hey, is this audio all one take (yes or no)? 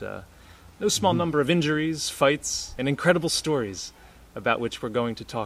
no